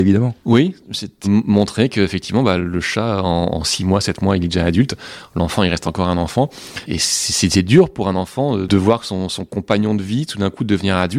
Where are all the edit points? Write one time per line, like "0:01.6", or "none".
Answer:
0:01.2